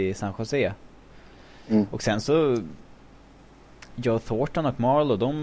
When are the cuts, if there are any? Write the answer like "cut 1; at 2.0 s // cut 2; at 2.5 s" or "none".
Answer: none